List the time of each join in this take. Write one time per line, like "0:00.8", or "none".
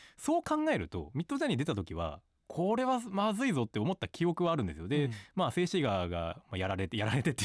none